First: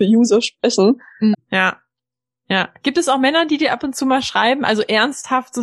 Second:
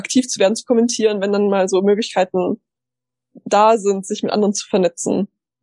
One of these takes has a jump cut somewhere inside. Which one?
first; 1 cut; at 1.3 s

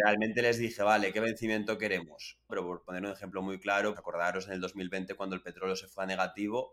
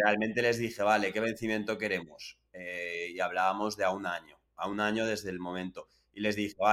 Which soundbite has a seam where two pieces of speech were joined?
first; 2 cuts; at 2.5 s, 3.9 s

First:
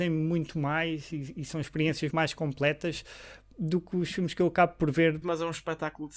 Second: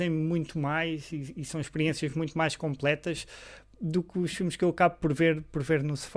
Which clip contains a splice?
first; 2 cuts; at 2.1 s, 5.2 s

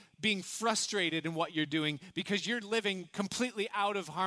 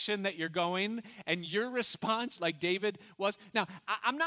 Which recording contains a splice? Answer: second; 1 cut; at 2.4 s

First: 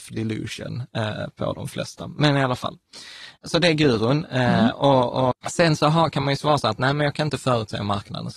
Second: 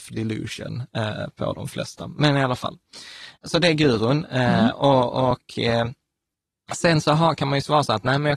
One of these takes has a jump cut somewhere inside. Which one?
first; 1 cut; at 5.3 s

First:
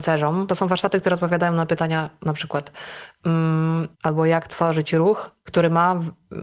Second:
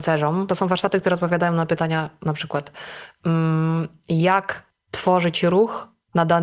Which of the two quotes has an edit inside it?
first; 2 cuts; at 3.9 s, 5.5 s

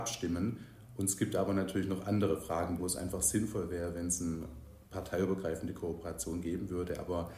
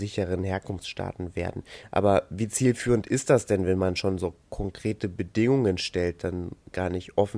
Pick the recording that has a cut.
first; 1 cut; at 2.8 s

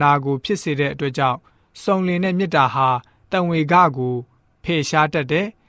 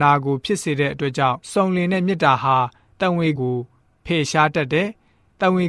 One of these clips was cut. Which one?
second; 2 cuts; at 1.4 s, 3.4 s

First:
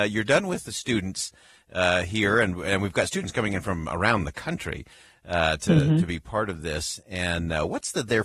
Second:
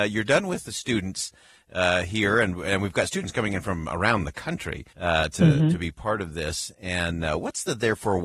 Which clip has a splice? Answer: second; 1 cut; at 4.9 s

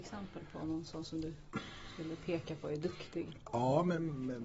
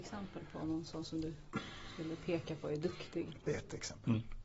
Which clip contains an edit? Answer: second; 1 cut; at 3.4 s

